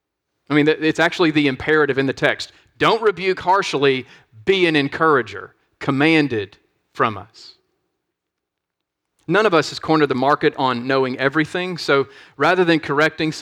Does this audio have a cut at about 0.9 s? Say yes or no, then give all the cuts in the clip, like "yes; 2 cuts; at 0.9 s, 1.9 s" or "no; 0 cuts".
no; 0 cuts